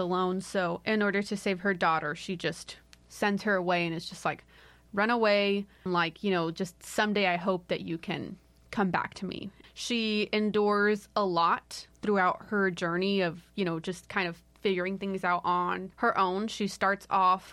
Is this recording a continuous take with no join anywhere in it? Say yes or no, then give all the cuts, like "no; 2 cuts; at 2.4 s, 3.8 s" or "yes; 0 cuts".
no; 3 cuts; at 5.9 s, 9.6 s, 15.9 s